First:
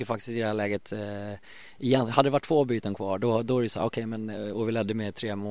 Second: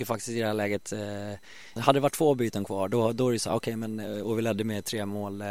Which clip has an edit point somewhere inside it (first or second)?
second